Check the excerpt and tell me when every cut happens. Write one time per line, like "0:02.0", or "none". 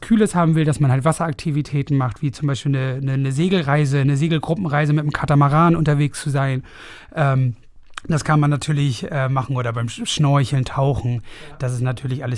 none

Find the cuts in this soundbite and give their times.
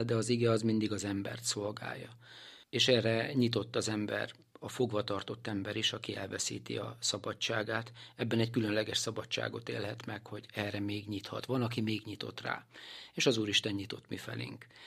0:02.6

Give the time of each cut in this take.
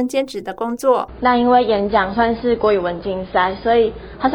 0:01.2

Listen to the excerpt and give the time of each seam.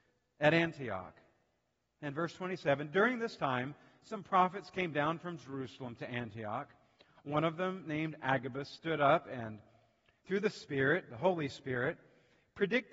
none

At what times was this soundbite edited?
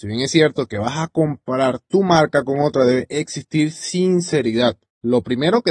none

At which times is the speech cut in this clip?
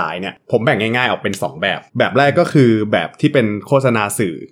0:01.9

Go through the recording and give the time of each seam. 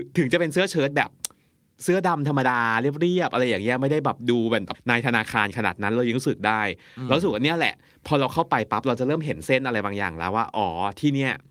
none

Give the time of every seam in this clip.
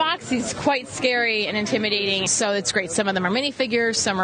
0:02.3

